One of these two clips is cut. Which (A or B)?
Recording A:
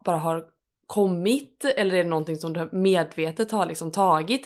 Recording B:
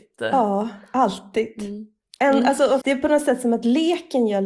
B